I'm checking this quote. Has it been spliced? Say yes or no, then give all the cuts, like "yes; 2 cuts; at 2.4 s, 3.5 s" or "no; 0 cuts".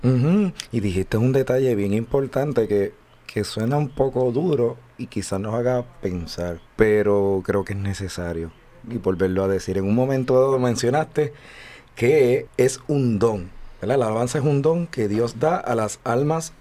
yes; 2 cuts; at 6.7 s, 12.5 s